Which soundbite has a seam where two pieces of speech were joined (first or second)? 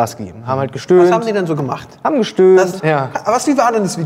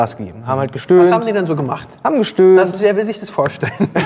first